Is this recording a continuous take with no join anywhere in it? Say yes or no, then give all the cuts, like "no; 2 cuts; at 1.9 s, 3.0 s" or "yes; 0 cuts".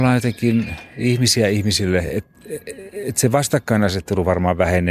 yes; 0 cuts